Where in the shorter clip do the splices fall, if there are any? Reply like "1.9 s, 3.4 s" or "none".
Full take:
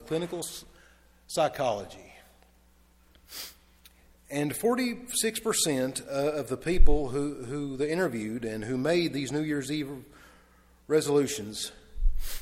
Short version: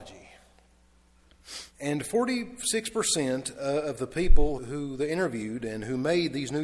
1.7 s, 4.6 s